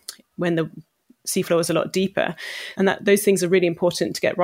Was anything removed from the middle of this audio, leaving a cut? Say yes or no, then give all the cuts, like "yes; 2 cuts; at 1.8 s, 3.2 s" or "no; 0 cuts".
yes; 1 cut; at 2.7 s